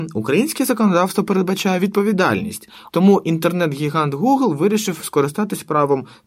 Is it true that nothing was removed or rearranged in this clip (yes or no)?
no